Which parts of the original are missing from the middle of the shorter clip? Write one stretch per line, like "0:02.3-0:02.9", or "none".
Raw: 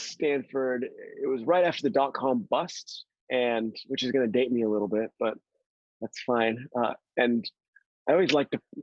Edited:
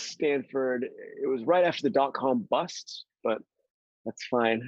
0:03.2-0:05.1